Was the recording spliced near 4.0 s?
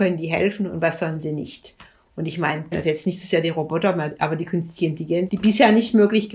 no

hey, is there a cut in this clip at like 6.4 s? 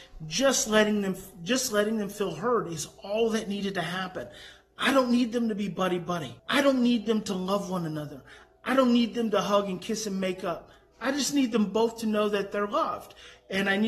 yes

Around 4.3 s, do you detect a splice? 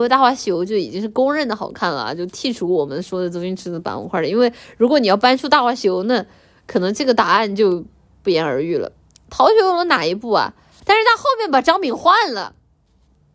no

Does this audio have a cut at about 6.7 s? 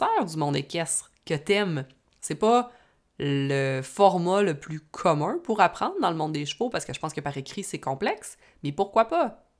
no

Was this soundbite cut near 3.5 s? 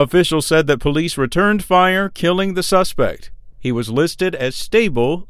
yes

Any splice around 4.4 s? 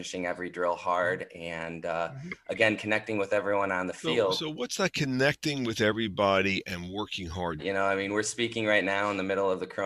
no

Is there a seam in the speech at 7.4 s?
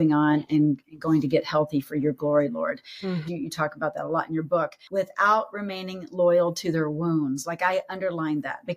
no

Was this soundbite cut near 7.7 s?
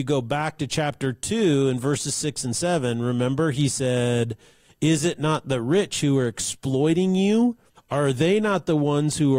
yes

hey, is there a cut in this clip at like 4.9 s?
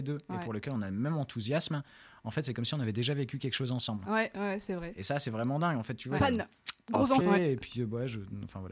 no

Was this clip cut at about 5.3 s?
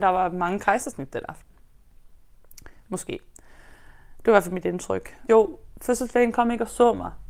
yes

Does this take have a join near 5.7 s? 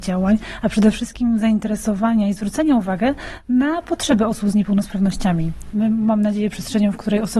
yes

